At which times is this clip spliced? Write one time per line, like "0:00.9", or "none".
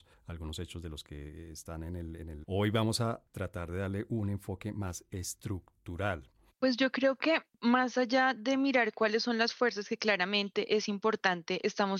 0:02.4
0:06.5